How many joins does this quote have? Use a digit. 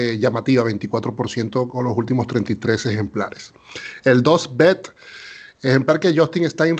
0